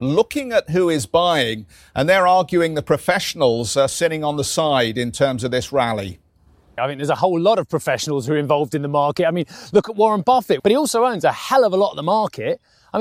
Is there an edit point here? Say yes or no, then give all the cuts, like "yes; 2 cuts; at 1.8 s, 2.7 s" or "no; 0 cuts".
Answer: yes; 2 cuts; at 6.8 s, 10.6 s